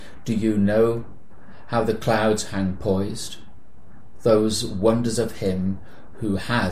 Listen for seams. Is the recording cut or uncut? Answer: uncut